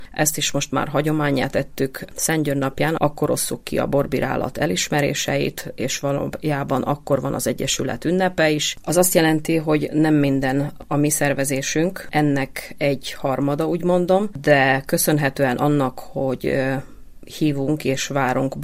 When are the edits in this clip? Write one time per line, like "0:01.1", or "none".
0:03.0
0:08.8